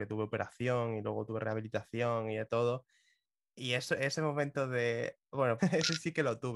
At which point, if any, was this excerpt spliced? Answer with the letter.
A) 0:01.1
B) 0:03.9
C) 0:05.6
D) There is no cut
C